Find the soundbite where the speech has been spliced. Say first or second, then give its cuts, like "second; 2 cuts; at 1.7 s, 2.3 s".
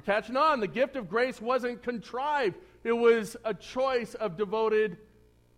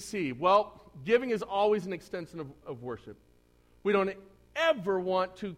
second; 1 cut; at 2.6 s